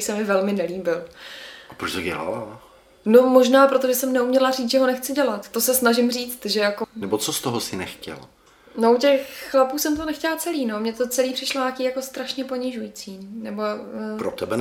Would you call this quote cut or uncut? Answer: cut